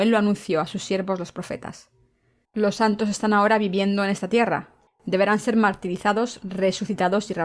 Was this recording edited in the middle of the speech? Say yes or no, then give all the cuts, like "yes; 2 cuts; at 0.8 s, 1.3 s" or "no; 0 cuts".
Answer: yes; 2 cuts; at 2.5 s, 4.9 s